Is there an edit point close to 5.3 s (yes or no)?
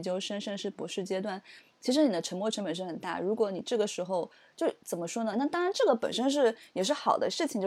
yes